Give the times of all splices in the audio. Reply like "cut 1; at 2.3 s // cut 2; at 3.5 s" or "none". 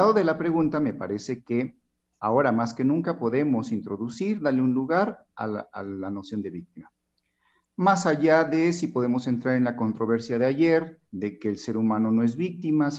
cut 1; at 7.6 s // cut 2; at 11.1 s